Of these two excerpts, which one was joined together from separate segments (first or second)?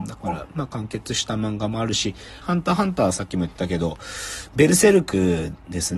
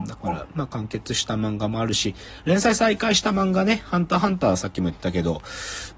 first